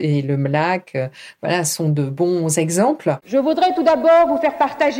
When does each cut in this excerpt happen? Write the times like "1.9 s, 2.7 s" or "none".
3.2 s